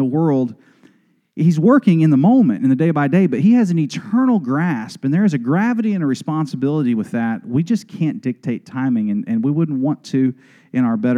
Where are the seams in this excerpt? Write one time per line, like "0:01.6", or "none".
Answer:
none